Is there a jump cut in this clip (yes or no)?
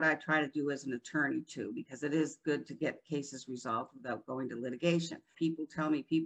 yes